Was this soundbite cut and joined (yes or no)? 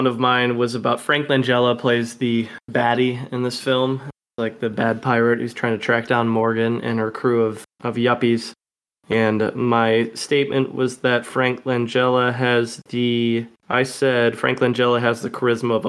no